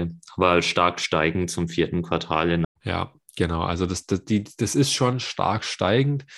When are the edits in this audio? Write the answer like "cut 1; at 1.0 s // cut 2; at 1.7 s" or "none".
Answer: cut 1; at 2.6 s